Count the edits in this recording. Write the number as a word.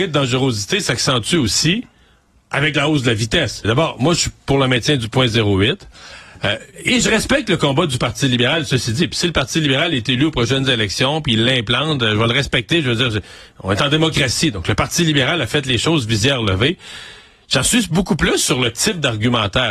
one